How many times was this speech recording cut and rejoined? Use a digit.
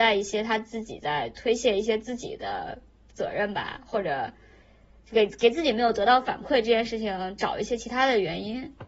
0